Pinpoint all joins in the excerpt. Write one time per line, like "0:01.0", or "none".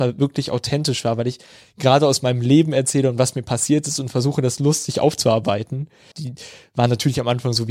0:06.1